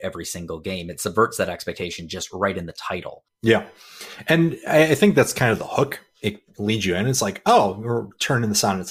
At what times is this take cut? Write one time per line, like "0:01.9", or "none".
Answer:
none